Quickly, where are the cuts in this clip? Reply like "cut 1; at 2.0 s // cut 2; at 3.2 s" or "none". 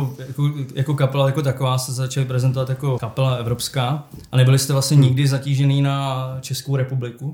cut 1; at 3.0 s